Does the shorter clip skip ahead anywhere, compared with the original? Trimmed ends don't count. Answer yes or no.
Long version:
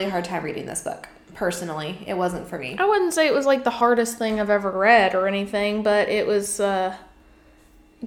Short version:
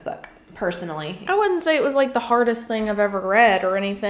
yes